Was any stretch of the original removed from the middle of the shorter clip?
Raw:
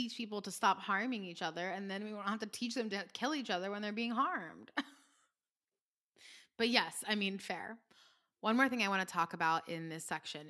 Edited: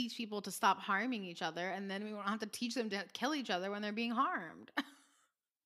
no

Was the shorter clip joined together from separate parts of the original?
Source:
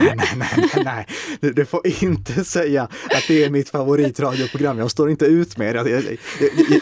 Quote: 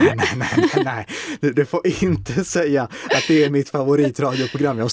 no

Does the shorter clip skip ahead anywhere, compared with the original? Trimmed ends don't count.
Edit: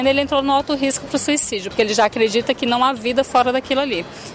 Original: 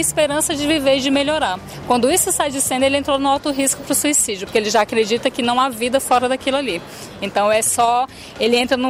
no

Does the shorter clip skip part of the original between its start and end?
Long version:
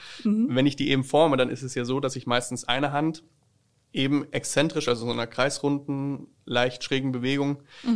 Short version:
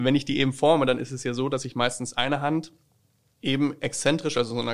no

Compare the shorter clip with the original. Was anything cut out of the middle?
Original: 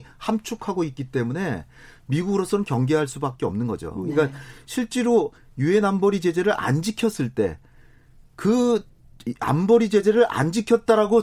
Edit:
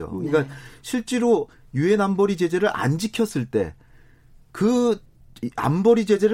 no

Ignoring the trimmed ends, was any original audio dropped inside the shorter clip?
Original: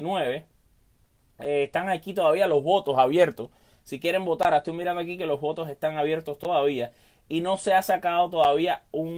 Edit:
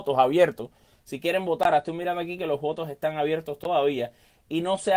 no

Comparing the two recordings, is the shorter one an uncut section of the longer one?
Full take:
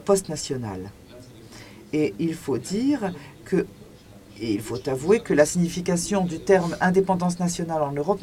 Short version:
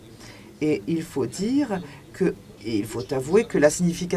no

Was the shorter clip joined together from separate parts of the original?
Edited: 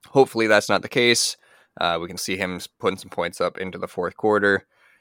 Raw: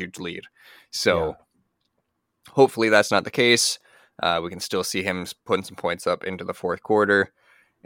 yes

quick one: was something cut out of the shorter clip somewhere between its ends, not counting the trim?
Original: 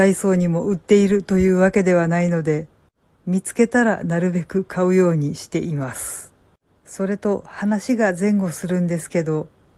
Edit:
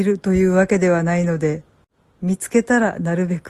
no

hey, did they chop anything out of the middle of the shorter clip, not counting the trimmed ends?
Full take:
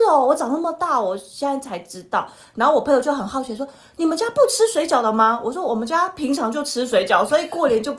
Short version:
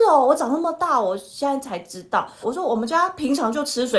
yes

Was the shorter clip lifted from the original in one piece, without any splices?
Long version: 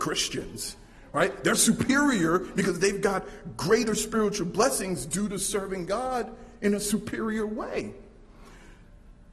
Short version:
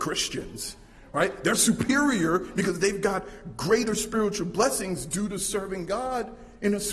yes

